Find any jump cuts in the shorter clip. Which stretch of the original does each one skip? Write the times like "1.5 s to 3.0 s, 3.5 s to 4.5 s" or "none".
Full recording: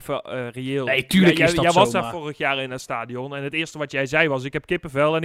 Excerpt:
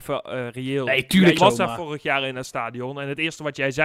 1.4 s to 1.7 s